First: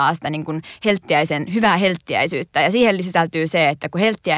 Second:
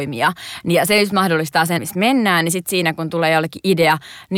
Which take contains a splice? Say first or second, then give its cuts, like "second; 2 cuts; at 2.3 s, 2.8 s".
second; 1 cut; at 1.8 s